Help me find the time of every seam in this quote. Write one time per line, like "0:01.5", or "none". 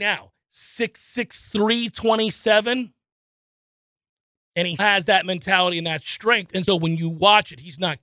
0:04.8
0:06.7